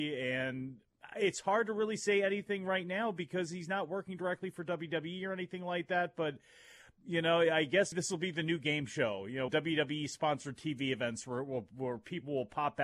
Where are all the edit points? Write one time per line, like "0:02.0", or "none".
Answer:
0:07.9
0:09.5